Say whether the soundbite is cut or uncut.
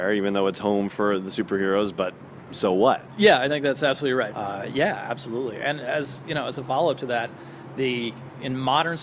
cut